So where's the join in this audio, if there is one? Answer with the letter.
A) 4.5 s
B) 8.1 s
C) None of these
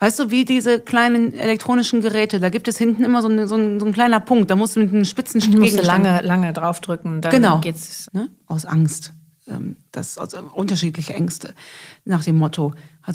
B